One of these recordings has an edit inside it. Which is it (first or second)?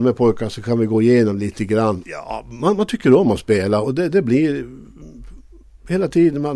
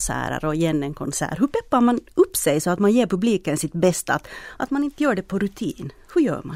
first